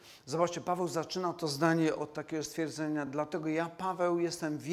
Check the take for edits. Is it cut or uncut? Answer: uncut